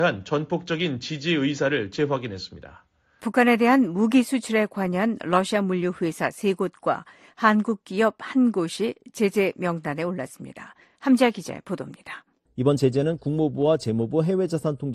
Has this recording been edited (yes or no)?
yes